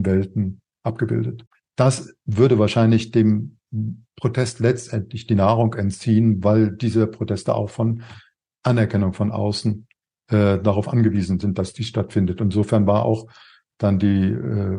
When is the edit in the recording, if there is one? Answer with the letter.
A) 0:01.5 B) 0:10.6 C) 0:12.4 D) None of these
A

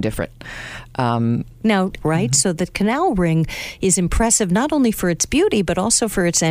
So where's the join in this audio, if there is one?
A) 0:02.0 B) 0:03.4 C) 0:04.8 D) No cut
A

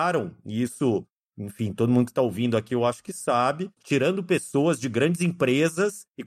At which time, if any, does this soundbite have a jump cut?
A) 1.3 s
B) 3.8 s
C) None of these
B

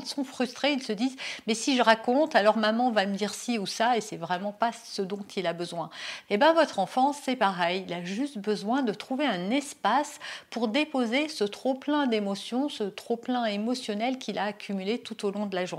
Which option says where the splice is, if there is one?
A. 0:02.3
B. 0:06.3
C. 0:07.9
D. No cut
B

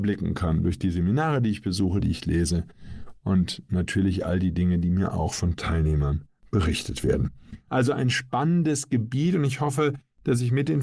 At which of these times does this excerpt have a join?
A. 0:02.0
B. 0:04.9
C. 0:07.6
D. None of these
A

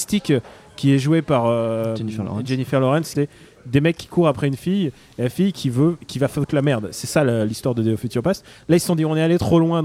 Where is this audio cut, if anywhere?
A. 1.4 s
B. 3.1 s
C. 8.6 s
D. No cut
B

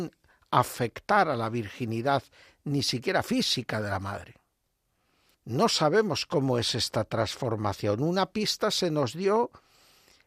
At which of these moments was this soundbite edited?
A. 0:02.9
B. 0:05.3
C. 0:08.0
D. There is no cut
B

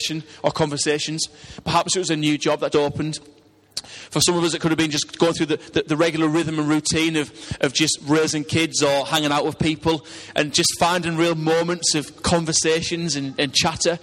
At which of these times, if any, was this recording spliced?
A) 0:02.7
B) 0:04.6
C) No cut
A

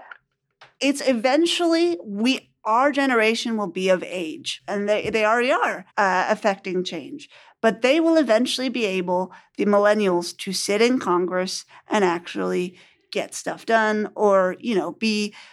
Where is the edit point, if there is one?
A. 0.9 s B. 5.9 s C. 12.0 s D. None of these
B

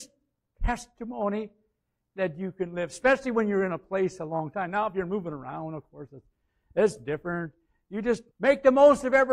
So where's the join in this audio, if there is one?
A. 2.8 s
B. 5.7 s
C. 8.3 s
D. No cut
C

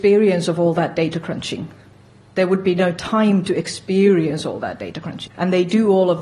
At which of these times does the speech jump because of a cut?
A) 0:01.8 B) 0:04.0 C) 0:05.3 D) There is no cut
C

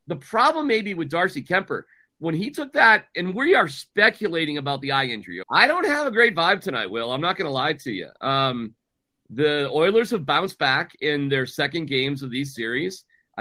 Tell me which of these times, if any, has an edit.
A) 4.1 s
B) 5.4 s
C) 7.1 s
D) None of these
B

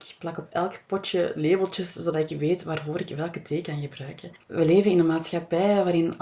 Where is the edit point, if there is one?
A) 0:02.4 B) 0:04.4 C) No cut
B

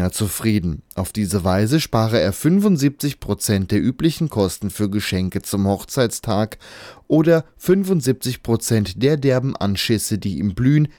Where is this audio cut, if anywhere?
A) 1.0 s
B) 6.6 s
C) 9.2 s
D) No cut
D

